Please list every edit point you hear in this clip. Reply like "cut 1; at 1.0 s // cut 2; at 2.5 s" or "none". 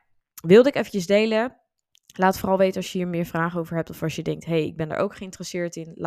none

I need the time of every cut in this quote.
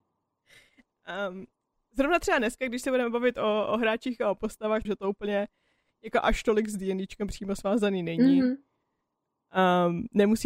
cut 1; at 4.9 s

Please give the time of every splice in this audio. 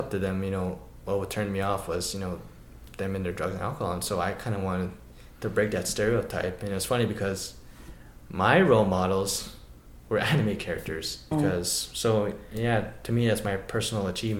cut 1; at 11.3 s

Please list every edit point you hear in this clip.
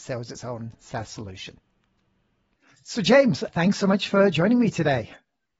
cut 1; at 3.5 s

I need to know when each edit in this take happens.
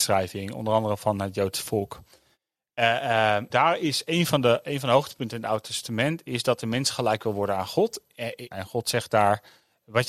cut 1; at 3.5 s // cut 2; at 8.5 s

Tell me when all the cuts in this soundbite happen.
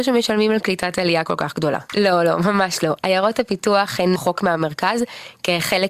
cut 1; at 1.9 s // cut 2; at 4.2 s

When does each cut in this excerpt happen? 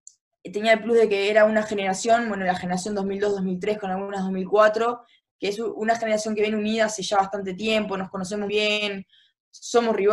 cut 1; at 8.5 s

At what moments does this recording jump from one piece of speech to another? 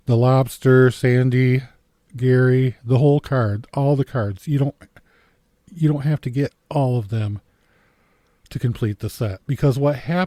none

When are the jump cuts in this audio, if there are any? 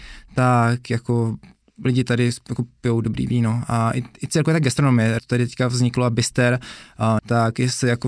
cut 1; at 5.2 s // cut 2; at 7.2 s

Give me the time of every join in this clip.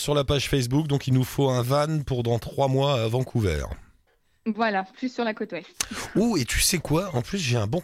none

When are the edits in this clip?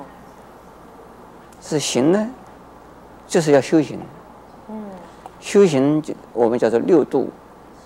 cut 1; at 1.4 s

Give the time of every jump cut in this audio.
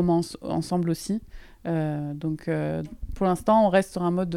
cut 1; at 2.8 s

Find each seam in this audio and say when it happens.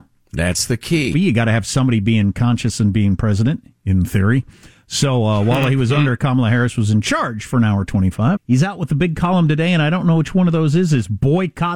cut 1; at 1.1 s // cut 2; at 8.4 s

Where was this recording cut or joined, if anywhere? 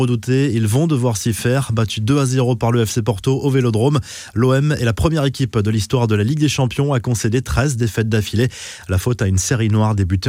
none

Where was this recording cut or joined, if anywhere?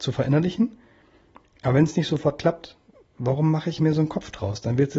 none

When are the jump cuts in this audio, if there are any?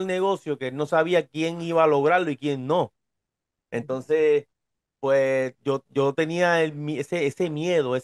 none

